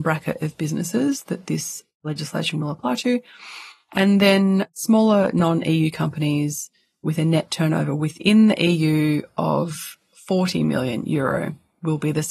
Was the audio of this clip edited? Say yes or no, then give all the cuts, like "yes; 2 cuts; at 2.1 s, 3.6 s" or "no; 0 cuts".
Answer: no; 0 cuts